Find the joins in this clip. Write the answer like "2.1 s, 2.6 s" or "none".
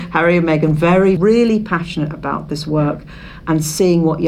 1.2 s

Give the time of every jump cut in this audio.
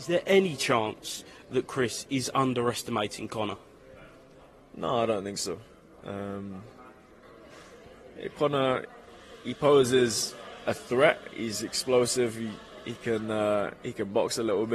6.0 s

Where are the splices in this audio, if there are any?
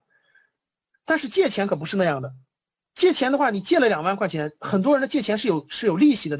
none

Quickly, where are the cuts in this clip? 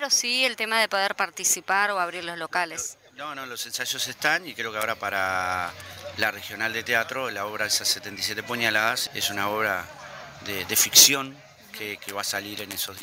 9.1 s, 12.0 s

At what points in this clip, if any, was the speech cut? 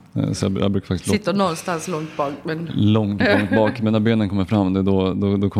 3.2 s

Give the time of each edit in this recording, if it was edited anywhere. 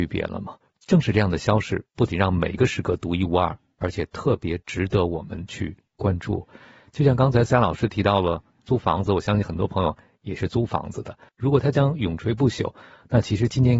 11.3 s

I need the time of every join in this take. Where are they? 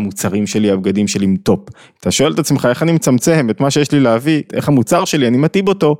2.0 s, 4.5 s

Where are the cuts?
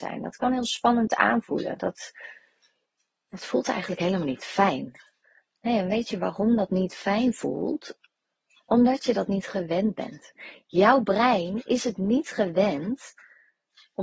none

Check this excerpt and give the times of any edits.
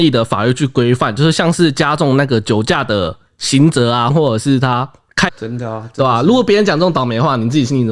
4.1 s, 5.3 s

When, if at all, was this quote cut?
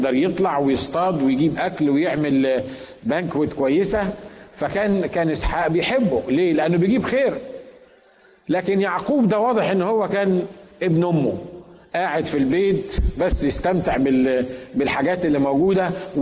none

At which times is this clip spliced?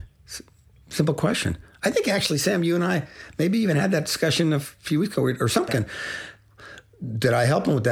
5.7 s

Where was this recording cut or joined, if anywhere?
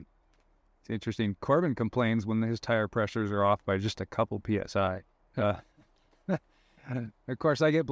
none

